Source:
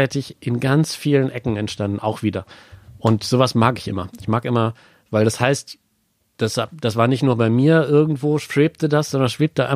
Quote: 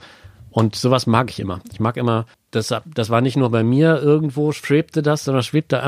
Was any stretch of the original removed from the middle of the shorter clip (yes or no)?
yes